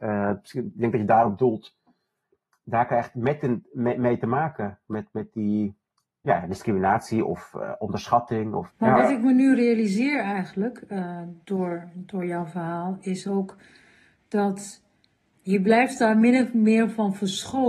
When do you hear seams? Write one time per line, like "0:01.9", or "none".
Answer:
0:08.7
0:15.3